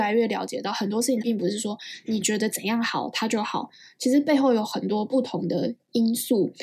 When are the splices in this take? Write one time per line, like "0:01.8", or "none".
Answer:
0:01.2